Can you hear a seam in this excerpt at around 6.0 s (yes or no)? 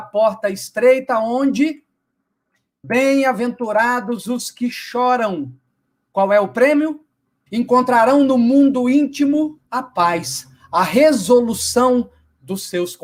no